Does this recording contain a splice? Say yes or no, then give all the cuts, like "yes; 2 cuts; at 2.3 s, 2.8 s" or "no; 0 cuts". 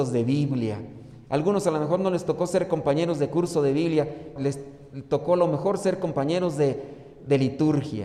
yes; 1 cut; at 4.4 s